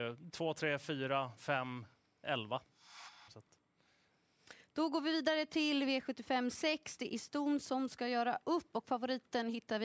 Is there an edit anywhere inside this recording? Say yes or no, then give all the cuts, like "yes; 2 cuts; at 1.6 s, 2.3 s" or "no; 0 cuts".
yes; 1 cut; at 3.3 s